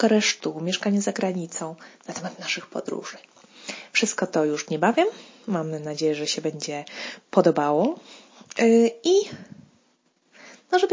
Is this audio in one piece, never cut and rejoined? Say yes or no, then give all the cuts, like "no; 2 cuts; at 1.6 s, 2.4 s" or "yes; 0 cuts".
yes; 0 cuts